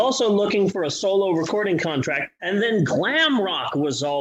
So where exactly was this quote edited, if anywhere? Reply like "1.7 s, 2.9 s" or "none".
2.4 s